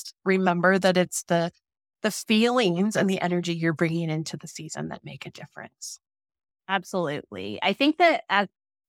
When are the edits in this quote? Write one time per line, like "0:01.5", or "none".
none